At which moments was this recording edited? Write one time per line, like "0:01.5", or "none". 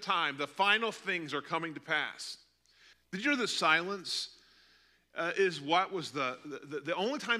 0:02.9